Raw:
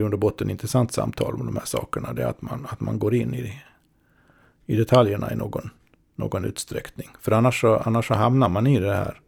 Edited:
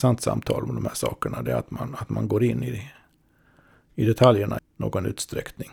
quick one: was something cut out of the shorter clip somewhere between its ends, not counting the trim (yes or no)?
yes